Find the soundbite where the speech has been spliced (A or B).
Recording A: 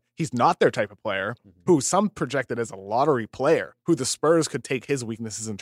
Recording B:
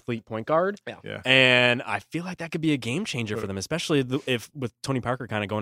A